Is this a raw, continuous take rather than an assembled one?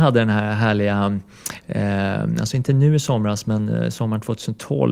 yes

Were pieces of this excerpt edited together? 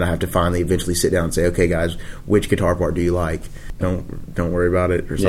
yes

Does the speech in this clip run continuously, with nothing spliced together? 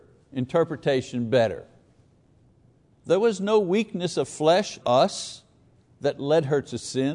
no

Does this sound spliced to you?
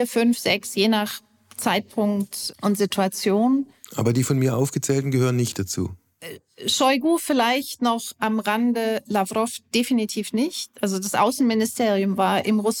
no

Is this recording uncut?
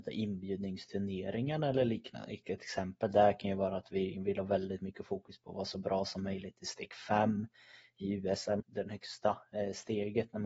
no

